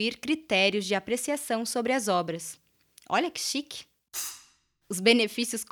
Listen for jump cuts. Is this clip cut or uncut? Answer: uncut